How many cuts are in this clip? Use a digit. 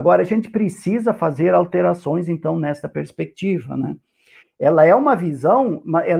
1